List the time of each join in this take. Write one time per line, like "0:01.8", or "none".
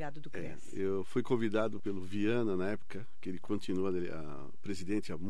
0:01.8